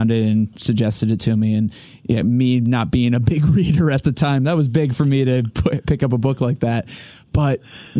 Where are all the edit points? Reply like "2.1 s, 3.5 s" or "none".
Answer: none